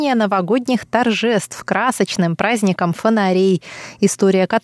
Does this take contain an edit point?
no; 0 cuts

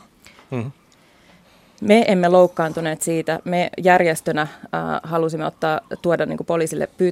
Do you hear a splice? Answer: no; 0 cuts

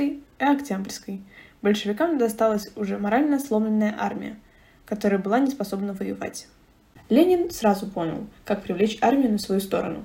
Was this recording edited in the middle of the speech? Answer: yes; 1 cut; at 7.0 s

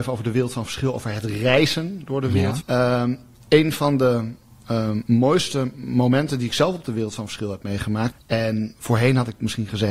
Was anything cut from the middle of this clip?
yes; 2 cuts; at 2.6 s, 8.1 s

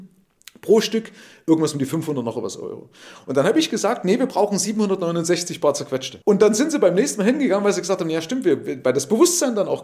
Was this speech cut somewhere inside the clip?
yes; 1 cut; at 6.2 s

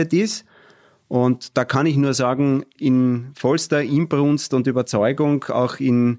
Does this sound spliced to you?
no; 0 cuts

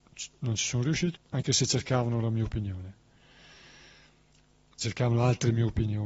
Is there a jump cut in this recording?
yes; 1 cut; at 1.1 s

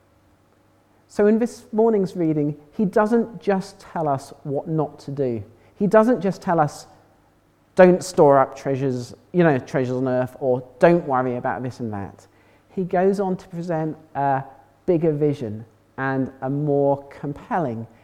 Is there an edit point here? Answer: no; 0 cuts

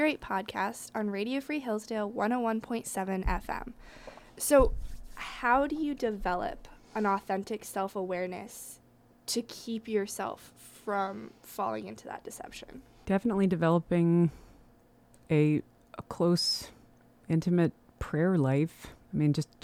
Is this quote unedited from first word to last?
yes; 0 cuts

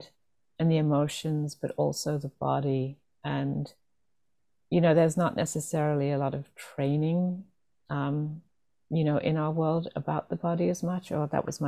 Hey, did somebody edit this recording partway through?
no; 0 cuts

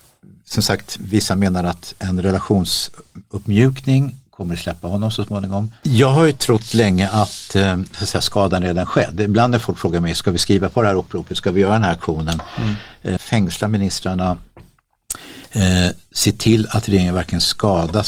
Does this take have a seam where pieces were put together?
yes; 2 cuts; at 5.8 s, 13.2 s

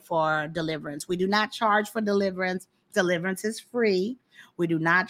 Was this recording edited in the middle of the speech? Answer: no; 0 cuts

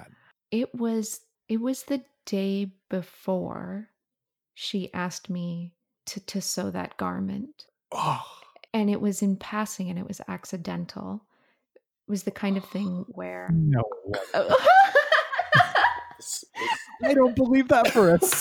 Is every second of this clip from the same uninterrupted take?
yes; 0 cuts

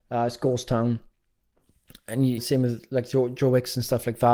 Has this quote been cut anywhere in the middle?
yes; 1 cut; at 2.4 s

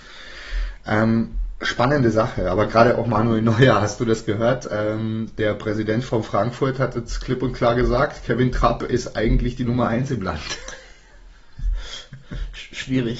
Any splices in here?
no; 0 cuts

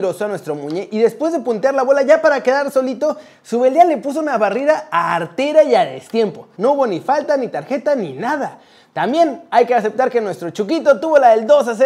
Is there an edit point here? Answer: yes; 1 cut; at 6.5 s

